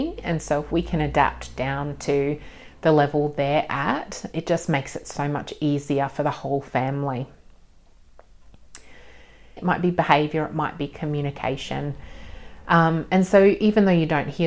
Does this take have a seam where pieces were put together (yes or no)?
yes